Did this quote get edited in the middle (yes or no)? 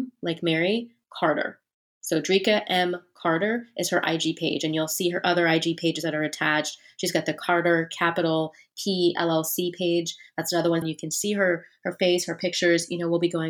yes